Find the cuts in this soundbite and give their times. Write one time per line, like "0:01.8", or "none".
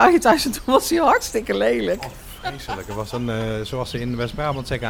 none